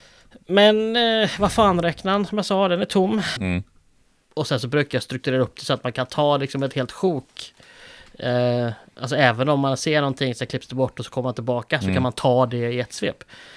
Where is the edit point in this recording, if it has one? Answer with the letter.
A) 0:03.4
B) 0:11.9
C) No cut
A